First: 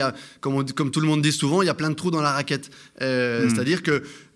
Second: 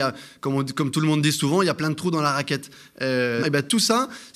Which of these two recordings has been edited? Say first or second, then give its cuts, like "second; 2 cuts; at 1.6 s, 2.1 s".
second; 1 cut; at 3.4 s